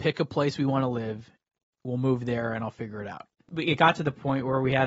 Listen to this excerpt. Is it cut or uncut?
uncut